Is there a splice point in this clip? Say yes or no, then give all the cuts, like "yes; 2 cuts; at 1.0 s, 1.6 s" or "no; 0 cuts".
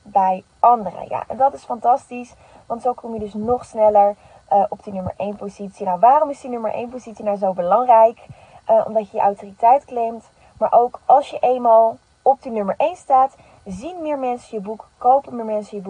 no; 0 cuts